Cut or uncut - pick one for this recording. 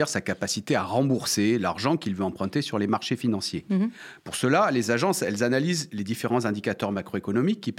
uncut